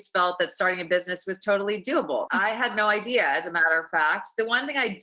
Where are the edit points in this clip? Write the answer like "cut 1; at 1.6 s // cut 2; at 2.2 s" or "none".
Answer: cut 1; at 2.3 s